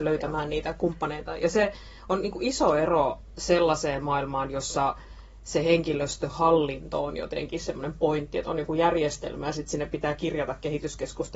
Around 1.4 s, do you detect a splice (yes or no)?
no